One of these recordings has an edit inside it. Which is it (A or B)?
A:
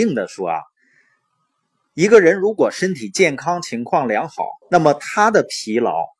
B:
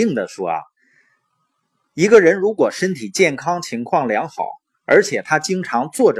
A